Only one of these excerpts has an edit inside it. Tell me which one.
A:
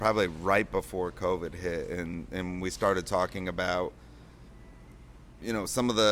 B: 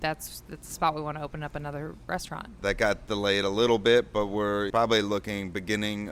B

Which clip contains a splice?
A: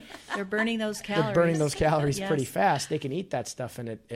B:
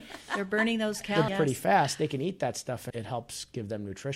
B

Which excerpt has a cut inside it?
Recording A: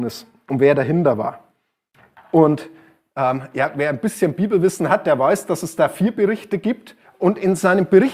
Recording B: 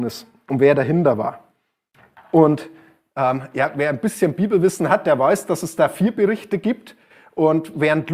A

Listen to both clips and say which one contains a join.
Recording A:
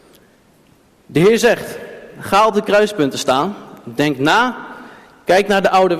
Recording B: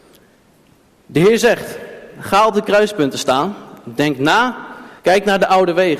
B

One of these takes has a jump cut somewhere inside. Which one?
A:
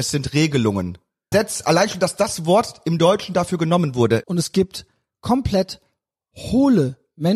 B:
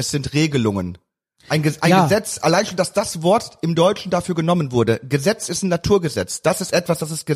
A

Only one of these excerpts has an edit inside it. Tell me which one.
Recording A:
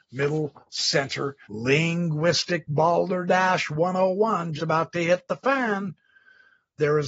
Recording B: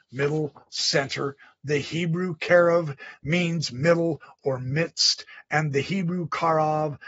A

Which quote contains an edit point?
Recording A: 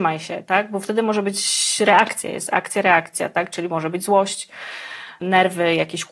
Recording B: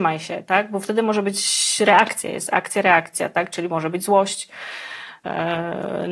A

